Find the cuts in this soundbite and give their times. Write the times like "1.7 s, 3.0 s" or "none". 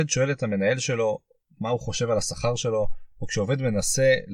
none